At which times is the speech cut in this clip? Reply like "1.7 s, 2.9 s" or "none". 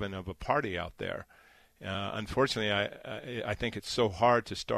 none